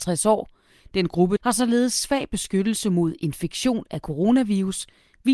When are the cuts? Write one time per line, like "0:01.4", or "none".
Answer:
0:01.4